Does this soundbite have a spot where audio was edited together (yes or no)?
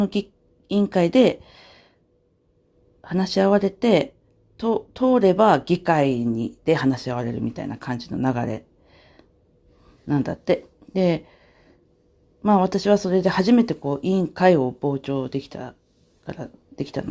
no